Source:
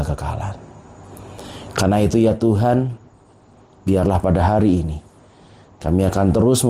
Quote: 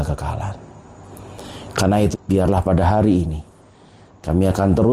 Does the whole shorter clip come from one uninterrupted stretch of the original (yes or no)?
no